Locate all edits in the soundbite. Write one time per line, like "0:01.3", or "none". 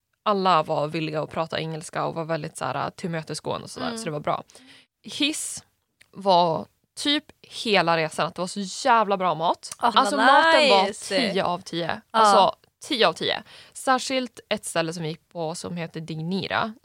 0:09.9

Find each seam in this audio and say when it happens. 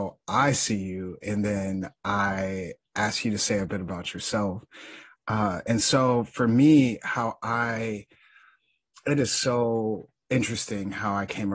none

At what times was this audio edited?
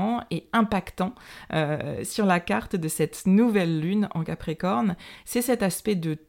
none

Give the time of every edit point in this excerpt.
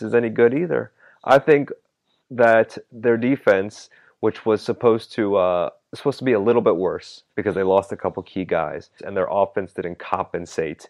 0:07.3
0:09.0

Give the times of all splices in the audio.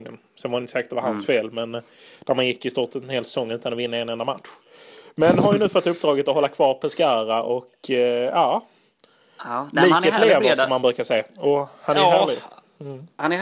none

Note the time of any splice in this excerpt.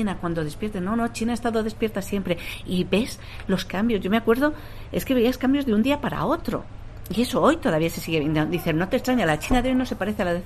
none

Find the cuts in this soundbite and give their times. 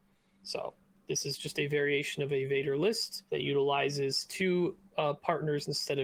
0:03.3

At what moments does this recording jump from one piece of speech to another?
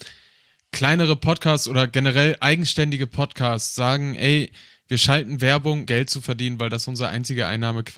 0:05.9

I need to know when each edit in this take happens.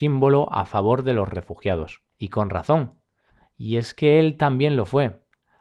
0:02.1

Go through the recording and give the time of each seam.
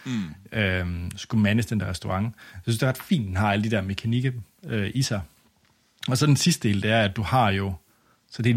none

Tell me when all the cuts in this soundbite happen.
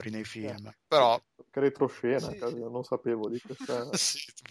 none

